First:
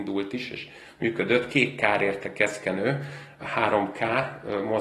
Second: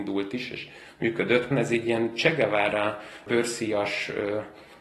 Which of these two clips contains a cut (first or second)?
second